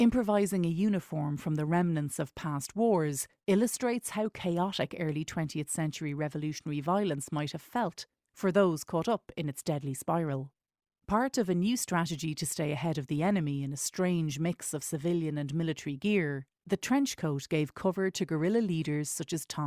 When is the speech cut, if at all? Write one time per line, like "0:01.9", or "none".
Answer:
none